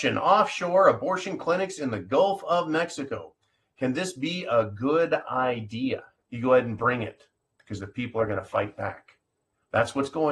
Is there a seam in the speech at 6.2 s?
yes; 1 cut; at 6.2 s

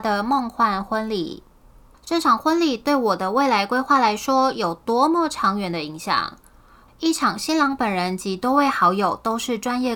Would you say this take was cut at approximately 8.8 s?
no; 2 cuts; at 1.9 s, 6.9 s

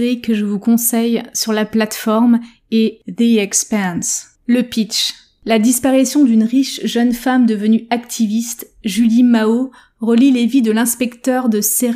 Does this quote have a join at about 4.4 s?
no; 0 cuts

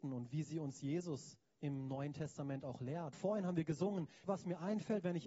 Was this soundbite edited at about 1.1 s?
no; 2 cuts; at 3.1 s, 4.3 s

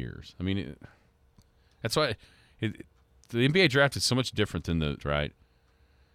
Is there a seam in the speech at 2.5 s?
no; 1 cut; at 5.0 s

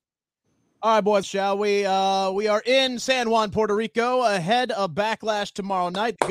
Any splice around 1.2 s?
yes; 1 cut; at 1.2 s

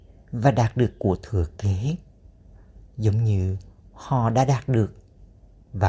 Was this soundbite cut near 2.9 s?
yes; 1 cut; at 2.9 s

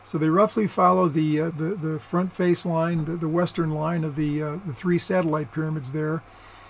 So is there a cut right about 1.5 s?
yes; 1 cut; at 1.5 s

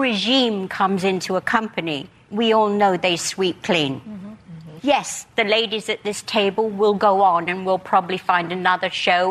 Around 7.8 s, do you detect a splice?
no; 1 cut; at 4.8 s

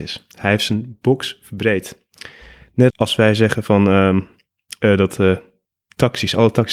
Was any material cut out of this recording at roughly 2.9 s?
yes; 1 cut; at 2.9 s

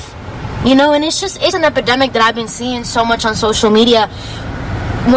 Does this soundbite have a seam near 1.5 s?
yes; 1 cut; at 1.5 s

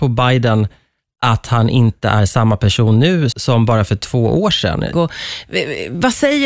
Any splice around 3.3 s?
yes; 2 cuts; at 3.3 s, 4.9 s

